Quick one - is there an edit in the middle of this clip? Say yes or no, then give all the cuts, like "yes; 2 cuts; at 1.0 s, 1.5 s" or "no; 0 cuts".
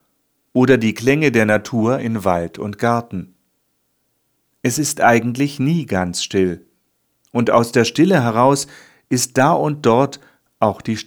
no; 0 cuts